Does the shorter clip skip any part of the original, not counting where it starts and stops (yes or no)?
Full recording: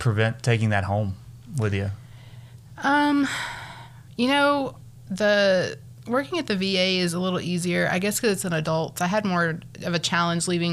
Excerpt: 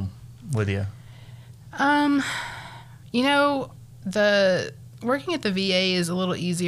no